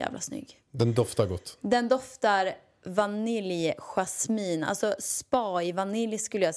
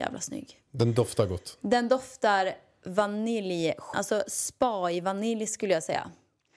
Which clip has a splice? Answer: second; 1 cut; at 3.9 s

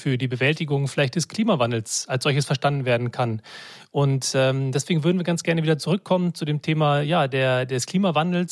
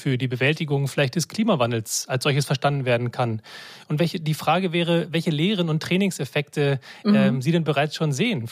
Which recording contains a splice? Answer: second; 1 cut; at 3.8 s

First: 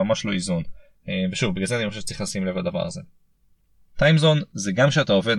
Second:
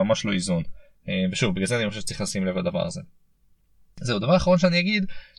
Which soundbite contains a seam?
first; 1 cut; at 3.9 s

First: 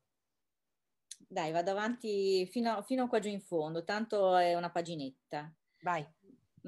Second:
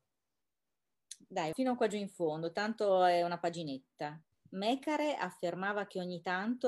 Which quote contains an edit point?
second; 2 cuts; at 1.5 s, 4.3 s

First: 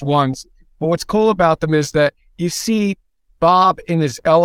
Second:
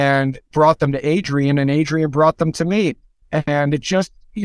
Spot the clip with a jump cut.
second; 1 cut; at 3.2 s

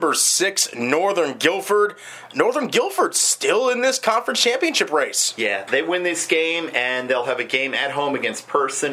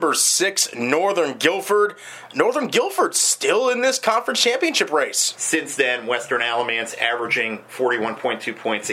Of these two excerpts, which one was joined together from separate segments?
second; 1 cut; at 5.3 s

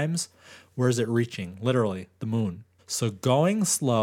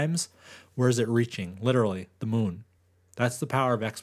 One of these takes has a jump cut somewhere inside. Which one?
first; 1 cut; at 2.8 s

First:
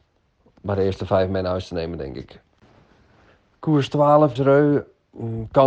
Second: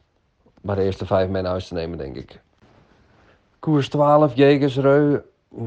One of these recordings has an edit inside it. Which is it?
first; 1 cut; at 4.4 s

